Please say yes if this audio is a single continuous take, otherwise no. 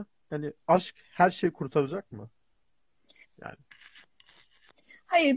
no